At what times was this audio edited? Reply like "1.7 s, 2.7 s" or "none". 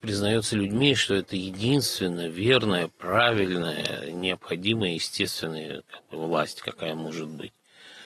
none

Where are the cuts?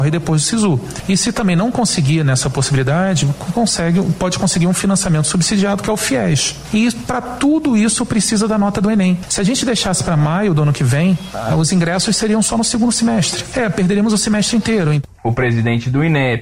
none

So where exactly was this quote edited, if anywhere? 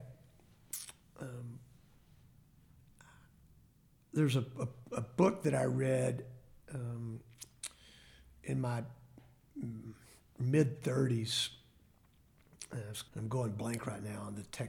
13.1 s

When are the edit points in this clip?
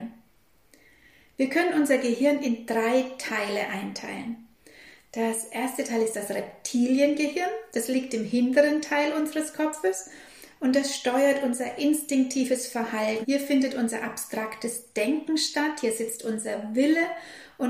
13.2 s

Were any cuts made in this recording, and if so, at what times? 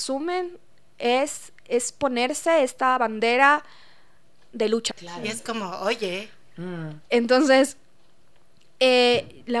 4.9 s, 7.1 s

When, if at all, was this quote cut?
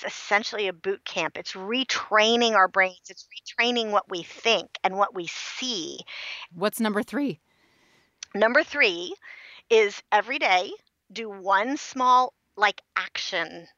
6.5 s

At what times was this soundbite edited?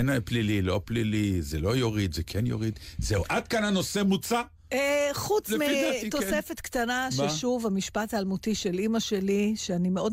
none

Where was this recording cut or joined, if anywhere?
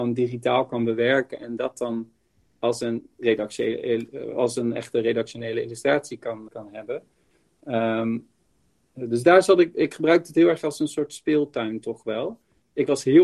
6.5 s

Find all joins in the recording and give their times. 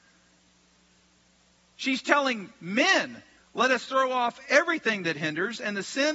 3.4 s

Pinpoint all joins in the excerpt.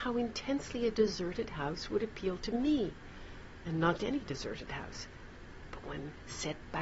4.0 s

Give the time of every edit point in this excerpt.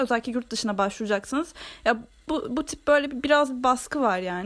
none

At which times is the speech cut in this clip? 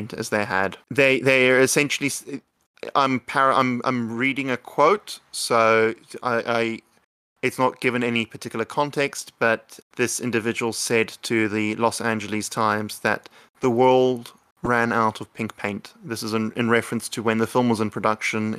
9.8 s

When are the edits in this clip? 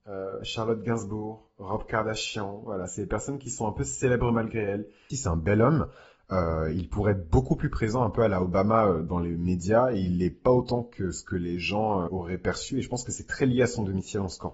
5.1 s, 12.1 s

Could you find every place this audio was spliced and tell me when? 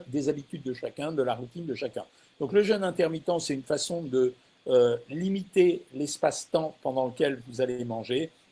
none

